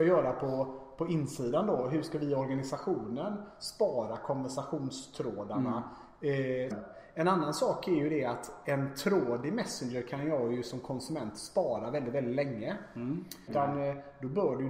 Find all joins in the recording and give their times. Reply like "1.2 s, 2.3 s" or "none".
6.7 s, 13.5 s

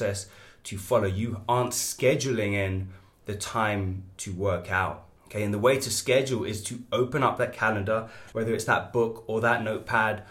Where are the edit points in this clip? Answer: 5.2 s, 8.3 s

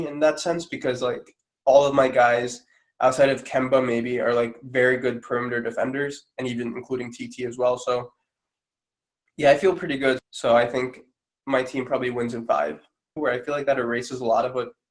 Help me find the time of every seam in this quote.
10.2 s, 13.2 s

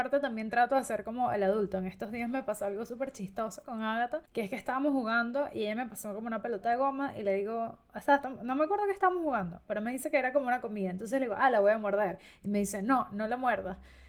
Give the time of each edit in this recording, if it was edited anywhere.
4.2 s

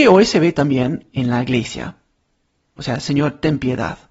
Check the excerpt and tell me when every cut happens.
2.8 s

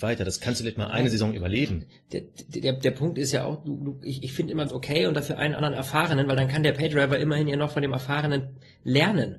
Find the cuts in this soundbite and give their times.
4.7 s

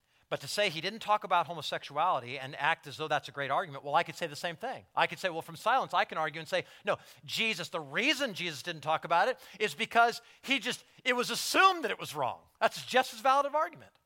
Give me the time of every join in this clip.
none

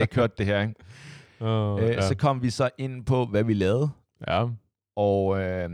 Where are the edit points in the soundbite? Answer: none

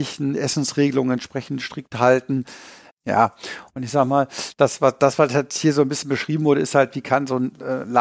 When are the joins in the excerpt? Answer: 2.9 s

